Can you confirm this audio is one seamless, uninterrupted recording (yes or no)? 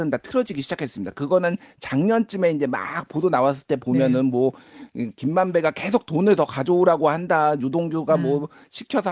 yes